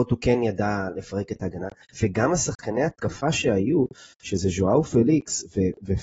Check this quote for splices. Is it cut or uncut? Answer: cut